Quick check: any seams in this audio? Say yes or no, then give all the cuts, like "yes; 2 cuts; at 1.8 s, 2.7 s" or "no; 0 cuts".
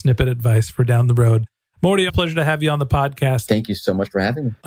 yes; 2 cuts; at 2.1 s, 3.5 s